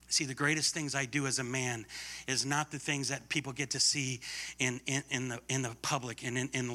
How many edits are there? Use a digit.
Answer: 0